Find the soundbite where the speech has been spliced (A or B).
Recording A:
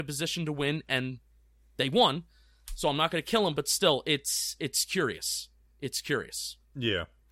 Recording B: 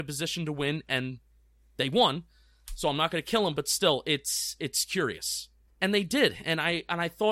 B